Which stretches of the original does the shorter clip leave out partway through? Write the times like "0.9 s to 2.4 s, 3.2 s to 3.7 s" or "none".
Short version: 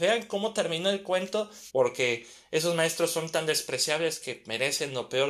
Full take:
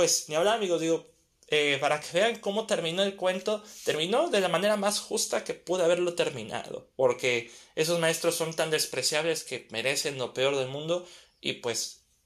3.8 s to 6.9 s